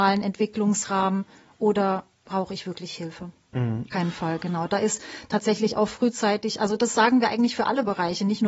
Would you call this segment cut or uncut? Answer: cut